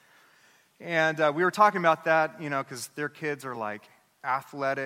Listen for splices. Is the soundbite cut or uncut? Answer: uncut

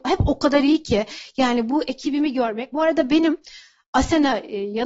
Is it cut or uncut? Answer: uncut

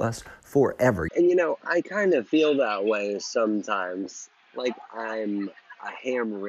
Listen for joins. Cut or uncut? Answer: cut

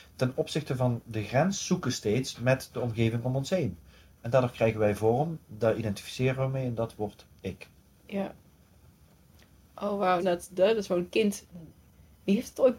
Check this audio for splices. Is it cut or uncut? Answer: cut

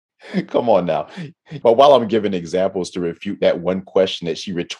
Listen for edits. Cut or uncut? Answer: cut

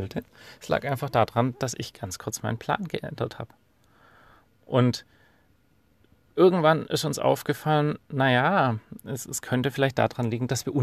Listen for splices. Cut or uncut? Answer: uncut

